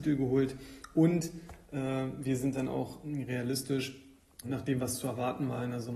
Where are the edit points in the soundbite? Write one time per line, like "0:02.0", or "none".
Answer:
0:04.4